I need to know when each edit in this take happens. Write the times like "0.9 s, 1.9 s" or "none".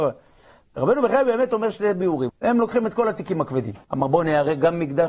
2.3 s, 3.8 s